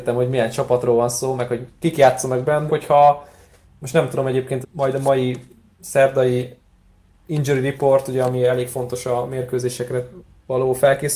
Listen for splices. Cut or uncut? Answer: cut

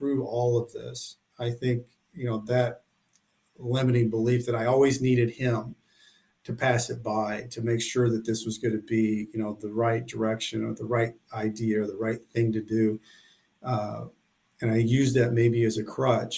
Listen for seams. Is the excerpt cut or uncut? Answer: uncut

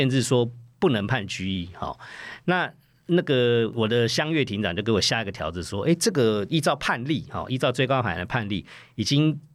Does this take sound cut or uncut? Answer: uncut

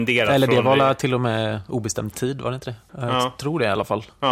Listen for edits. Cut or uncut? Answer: cut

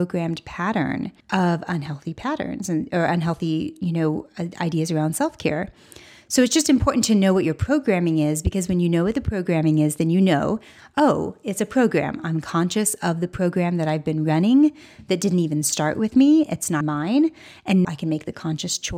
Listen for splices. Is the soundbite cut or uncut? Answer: cut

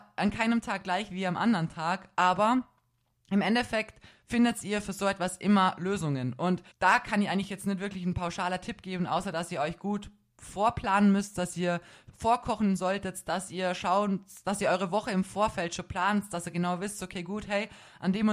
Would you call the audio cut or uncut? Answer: cut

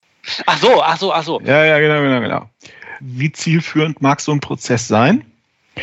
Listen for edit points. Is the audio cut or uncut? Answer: cut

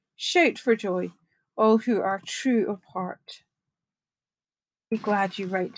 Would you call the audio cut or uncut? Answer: uncut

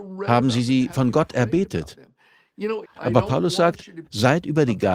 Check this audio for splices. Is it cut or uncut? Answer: cut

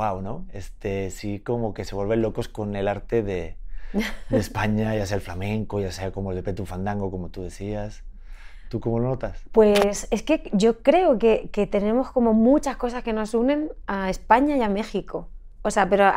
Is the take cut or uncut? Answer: uncut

